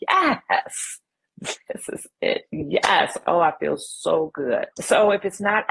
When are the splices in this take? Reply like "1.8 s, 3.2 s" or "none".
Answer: none

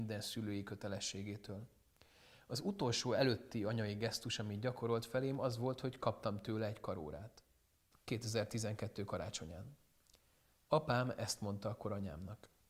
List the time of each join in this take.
7.9 s

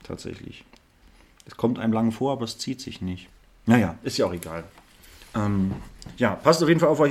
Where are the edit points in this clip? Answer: none

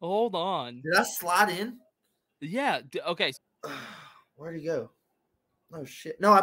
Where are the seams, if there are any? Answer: 3.3 s

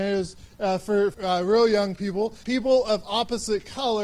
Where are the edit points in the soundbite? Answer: 1.1 s, 2.4 s

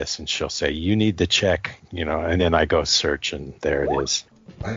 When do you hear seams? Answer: none

